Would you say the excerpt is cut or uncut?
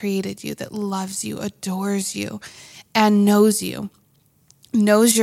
uncut